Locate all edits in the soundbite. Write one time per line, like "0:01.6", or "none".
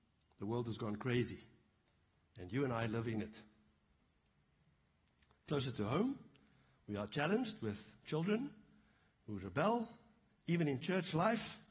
0:10.3